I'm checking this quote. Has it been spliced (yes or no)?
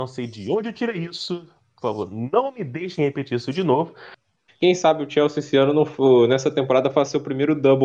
yes